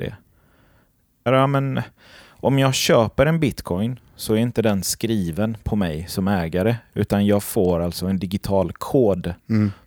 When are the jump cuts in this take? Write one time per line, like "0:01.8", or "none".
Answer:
0:01.3